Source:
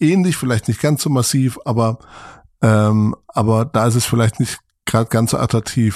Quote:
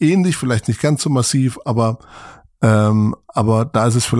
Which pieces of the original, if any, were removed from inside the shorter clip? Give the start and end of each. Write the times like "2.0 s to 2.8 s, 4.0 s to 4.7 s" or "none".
none